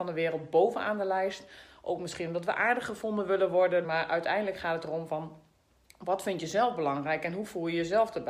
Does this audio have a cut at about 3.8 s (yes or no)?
yes